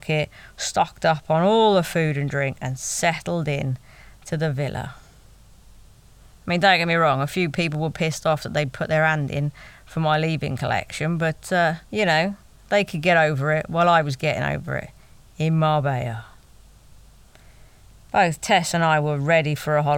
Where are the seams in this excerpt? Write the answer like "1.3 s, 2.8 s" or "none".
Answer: 6.3 s, 11.8 s